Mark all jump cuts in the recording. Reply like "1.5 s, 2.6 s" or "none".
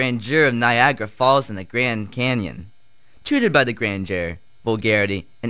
none